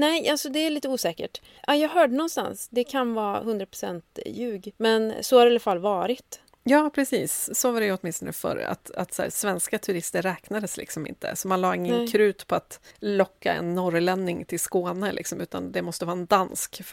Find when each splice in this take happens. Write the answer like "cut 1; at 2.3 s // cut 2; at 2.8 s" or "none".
none